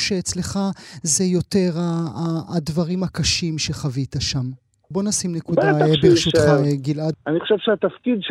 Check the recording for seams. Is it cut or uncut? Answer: cut